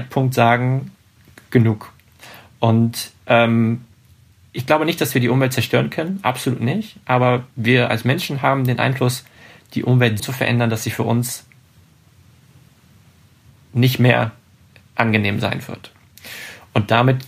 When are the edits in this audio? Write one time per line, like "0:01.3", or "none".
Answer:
0:10.2